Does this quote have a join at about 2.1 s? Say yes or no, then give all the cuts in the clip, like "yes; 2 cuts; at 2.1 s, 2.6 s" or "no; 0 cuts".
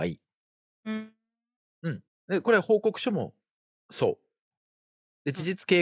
yes; 1 cut; at 2.1 s